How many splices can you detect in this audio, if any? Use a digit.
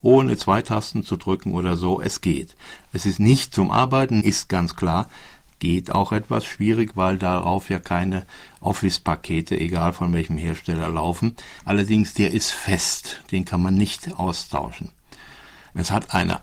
2